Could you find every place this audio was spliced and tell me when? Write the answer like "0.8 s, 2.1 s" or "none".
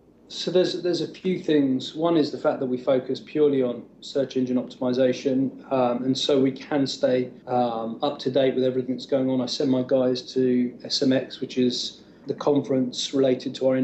7.4 s, 12.2 s

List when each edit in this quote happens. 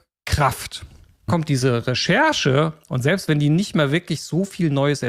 1.3 s

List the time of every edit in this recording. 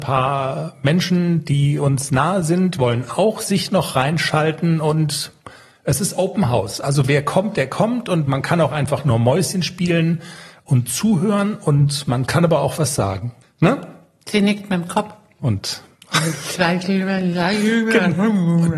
13.4 s, 15.4 s

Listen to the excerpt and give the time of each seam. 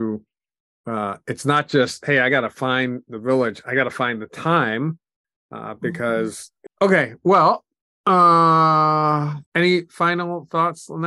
6.7 s, 9.5 s

